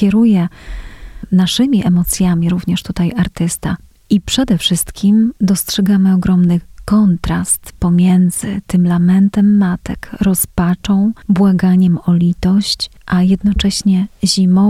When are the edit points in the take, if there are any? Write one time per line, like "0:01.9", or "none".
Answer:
none